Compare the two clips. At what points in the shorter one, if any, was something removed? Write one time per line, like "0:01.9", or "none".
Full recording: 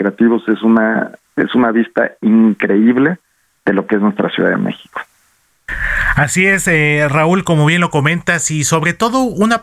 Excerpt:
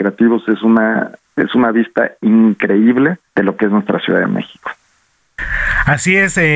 0:03.3